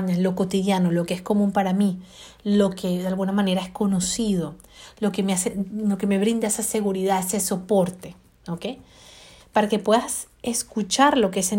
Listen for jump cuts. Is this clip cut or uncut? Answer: cut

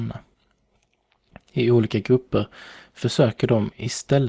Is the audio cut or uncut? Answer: uncut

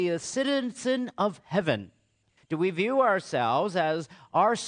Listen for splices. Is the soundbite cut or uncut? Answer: cut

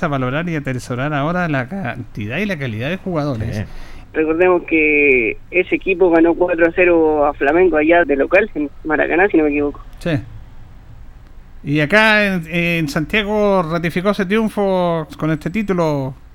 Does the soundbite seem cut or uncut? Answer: cut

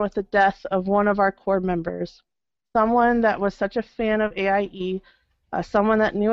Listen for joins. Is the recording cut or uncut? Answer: uncut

